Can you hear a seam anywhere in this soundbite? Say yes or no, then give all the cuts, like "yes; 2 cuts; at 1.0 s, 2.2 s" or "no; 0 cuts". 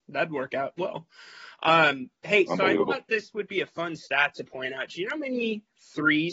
no; 0 cuts